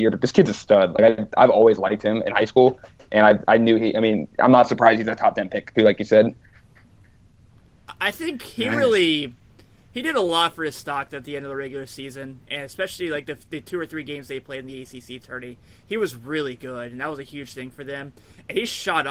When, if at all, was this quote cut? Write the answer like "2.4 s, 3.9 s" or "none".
5.7 s